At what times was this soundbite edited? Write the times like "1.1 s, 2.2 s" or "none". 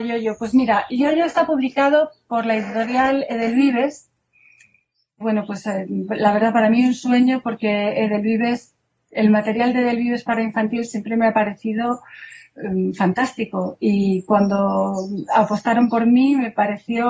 5.2 s